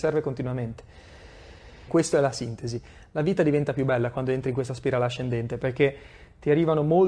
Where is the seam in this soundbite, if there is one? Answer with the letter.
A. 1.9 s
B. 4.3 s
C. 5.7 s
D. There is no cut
A